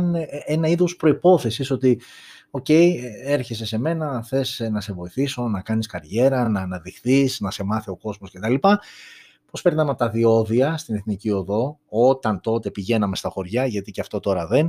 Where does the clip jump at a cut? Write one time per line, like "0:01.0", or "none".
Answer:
none